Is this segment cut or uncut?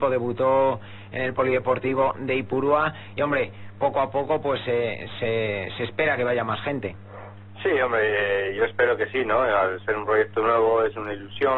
uncut